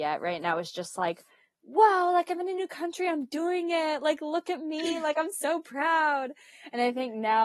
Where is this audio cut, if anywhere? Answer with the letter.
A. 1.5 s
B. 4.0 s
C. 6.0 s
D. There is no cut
D